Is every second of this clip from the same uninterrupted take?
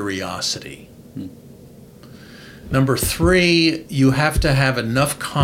yes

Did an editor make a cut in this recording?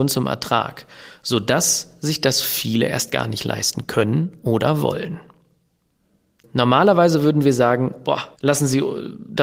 yes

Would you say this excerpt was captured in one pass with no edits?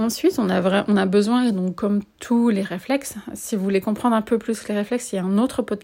yes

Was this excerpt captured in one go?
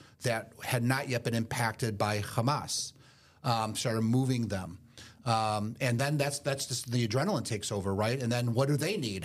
yes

